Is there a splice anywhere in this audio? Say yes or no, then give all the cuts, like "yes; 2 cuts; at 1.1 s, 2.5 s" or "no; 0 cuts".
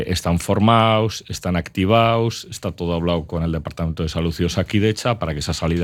no; 0 cuts